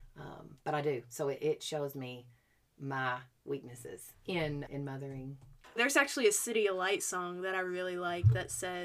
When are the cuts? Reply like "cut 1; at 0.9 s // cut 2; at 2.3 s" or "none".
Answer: cut 1; at 4.7 s // cut 2; at 5.8 s